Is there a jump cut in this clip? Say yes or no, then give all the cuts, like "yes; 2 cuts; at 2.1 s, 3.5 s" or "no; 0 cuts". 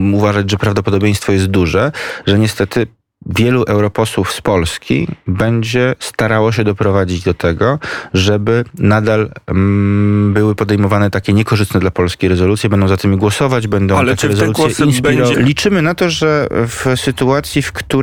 yes; 1 cut; at 15.3 s